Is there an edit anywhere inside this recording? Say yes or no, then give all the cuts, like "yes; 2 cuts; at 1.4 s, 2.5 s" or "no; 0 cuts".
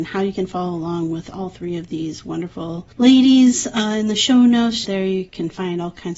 yes; 2 cuts; at 2.9 s, 4.8 s